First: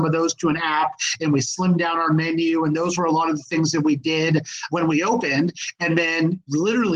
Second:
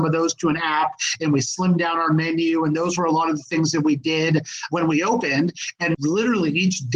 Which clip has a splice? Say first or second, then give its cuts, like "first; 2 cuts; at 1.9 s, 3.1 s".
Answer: second; 1 cut; at 5.9 s